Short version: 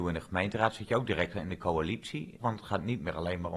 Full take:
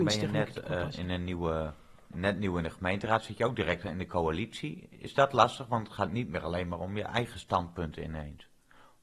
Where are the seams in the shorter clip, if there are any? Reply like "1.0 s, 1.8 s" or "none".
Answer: 2.4 s